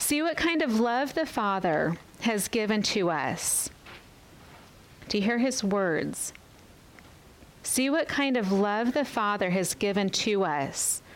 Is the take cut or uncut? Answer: cut